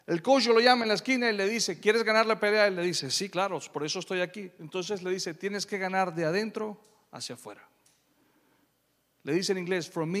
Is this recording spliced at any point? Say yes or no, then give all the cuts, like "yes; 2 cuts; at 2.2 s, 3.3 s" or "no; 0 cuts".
no; 0 cuts